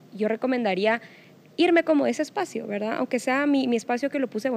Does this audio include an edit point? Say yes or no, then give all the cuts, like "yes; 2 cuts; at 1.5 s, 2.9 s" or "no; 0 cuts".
no; 0 cuts